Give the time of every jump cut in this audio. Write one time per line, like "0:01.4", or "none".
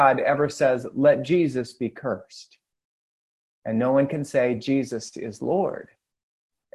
none